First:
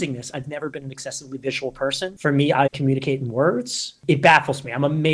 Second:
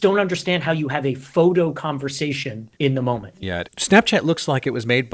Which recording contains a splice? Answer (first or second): second